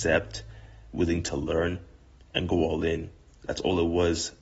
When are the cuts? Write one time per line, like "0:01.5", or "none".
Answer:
none